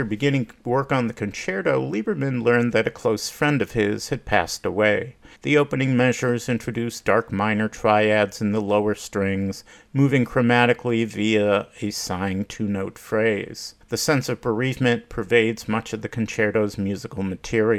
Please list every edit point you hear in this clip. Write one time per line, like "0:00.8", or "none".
0:05.3
0:13.8

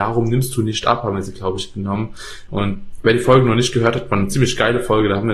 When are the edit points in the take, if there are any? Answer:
0:02.5

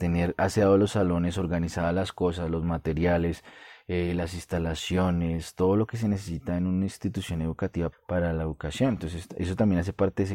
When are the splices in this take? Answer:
0:07.9

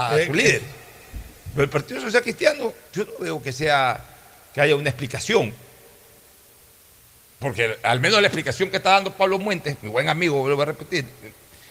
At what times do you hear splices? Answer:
0:02.9

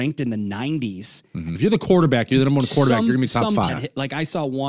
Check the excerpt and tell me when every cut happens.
0:01.6
0:03.7

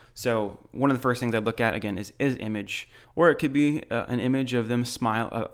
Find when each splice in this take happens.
0:03.0

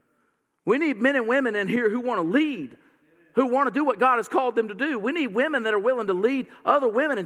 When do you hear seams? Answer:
none

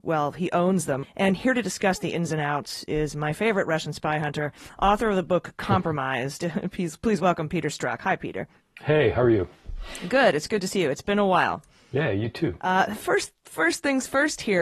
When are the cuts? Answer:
0:01.0

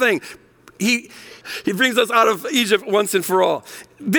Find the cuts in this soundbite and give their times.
0:01.4

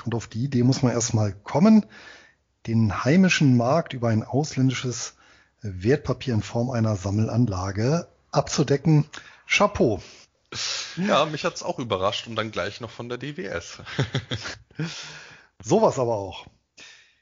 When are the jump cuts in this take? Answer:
none

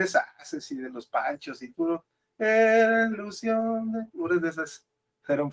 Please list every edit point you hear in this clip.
0:03.1

